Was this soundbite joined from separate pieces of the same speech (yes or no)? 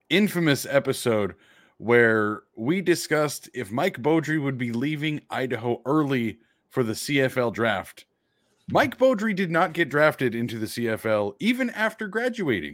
no